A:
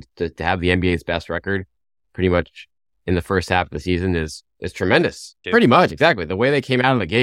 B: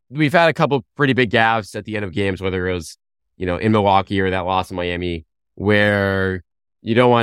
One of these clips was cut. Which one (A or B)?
A